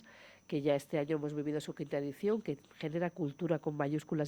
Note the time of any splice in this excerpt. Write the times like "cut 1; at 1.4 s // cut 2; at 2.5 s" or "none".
none